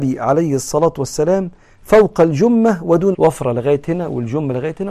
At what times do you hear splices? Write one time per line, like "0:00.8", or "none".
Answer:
0:03.1